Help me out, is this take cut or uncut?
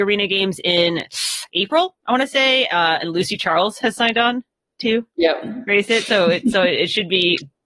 uncut